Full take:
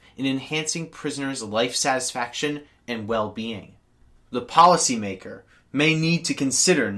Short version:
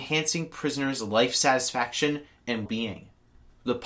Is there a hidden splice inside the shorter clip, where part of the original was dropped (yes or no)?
yes